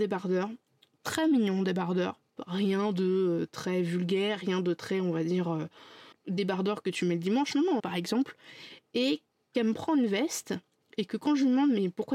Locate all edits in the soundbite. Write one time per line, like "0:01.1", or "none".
0:06.1
0:07.8